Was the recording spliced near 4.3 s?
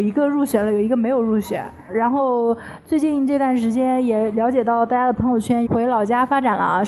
no; 2 cuts; at 1.9 s, 5.7 s

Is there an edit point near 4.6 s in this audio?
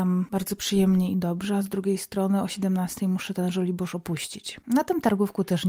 yes; 1 cut; at 4.6 s

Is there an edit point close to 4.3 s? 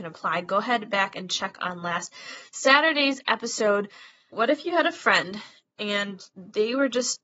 yes; 1 cut; at 4.3 s

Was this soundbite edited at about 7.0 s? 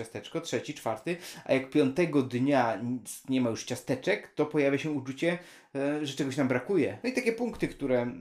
yes; 1 cut; at 7.0 s

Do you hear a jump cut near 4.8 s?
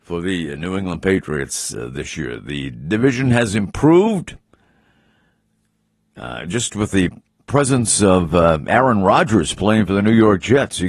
no; 0 cuts

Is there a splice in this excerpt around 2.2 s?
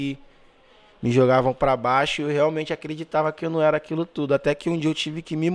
no; 0 cuts

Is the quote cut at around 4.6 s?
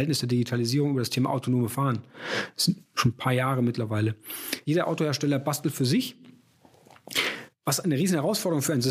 yes; 1 cut; at 4.6 s

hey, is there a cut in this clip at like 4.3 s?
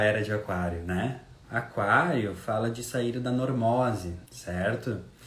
yes; 2 cuts; at 1.4 s, 4.3 s

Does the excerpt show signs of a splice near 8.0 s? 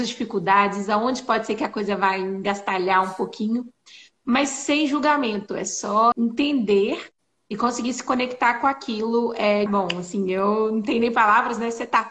no; 2 cuts; at 6.1 s, 9.7 s

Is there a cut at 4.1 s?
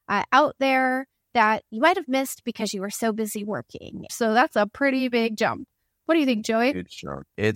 yes; 1 cut; at 4.1 s

